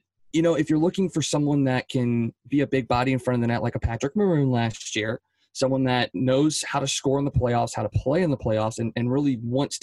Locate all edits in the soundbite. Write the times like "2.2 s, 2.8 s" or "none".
none